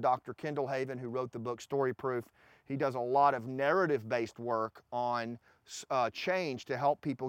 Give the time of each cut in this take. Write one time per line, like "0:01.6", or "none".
none